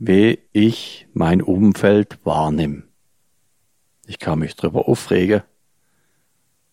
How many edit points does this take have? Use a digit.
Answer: 0